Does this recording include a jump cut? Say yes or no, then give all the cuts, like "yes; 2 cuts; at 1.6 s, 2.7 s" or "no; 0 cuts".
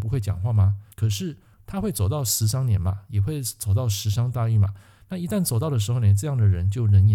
yes; 1 cut; at 0.9 s